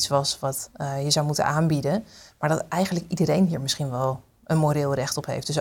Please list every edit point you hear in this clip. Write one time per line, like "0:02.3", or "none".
none